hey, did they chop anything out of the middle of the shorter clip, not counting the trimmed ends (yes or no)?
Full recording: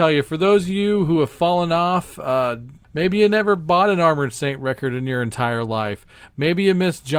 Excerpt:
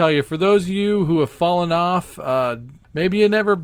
no